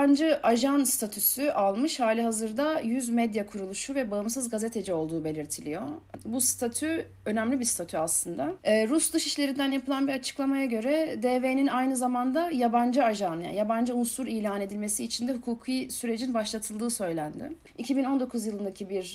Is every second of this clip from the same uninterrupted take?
no; 2 cuts; at 8.6 s, 17.7 s

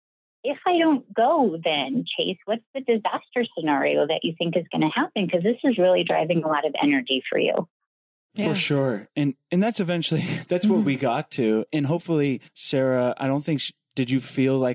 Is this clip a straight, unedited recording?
yes; 0 cuts

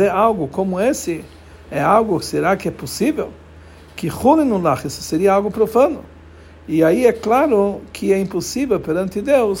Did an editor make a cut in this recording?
no; 0 cuts

